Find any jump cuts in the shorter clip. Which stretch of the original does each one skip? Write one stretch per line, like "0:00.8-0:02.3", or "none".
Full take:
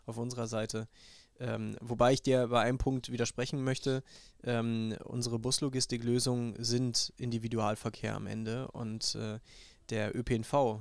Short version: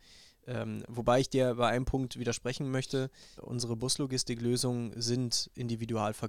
0:04.3-0:05.0